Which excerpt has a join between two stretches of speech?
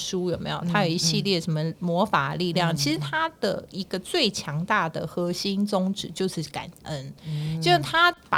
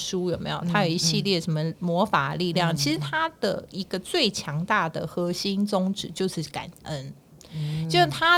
first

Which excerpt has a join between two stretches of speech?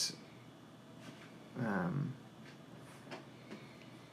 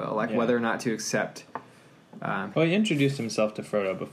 second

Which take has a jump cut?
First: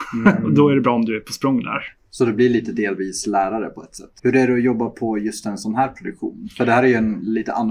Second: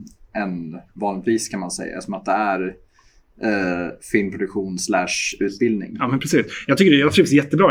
first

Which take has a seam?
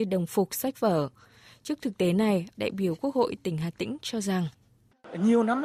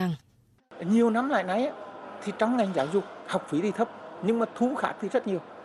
first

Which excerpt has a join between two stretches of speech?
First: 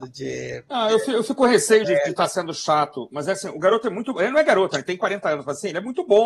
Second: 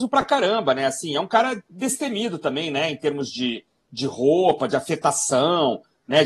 first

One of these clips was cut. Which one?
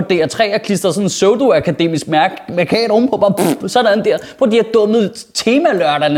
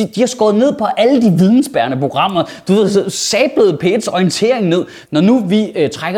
second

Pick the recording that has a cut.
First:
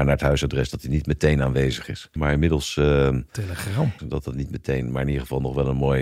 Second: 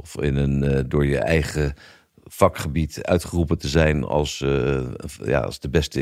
first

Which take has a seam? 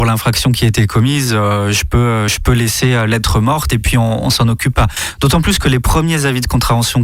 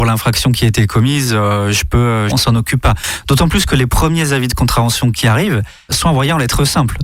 second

